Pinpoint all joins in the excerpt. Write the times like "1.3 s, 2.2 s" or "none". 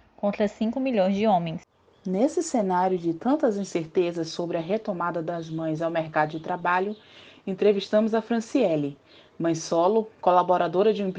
none